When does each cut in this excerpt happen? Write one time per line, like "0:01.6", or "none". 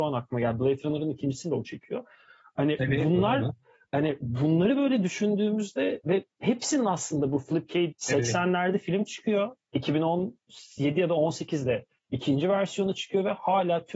0:07.9